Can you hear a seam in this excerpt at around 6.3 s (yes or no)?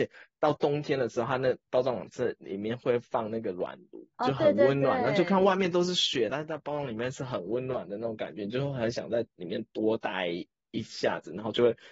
yes